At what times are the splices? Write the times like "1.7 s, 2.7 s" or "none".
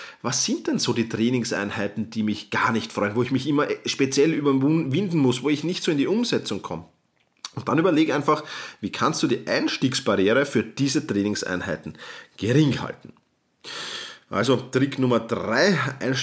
none